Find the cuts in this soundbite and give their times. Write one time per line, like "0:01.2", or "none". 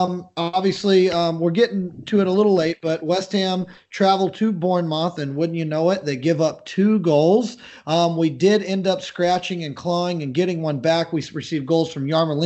none